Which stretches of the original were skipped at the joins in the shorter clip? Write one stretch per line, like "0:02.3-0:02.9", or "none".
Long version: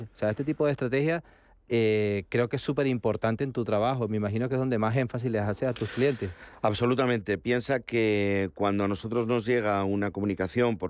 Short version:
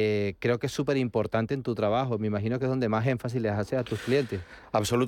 none